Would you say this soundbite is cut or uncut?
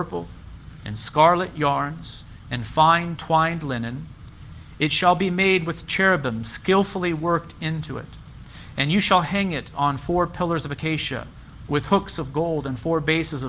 cut